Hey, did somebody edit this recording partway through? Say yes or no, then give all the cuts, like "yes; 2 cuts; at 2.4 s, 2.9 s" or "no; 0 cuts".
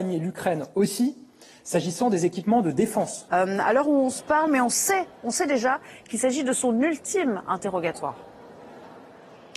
yes; 2 cuts; at 3.3 s, 4.5 s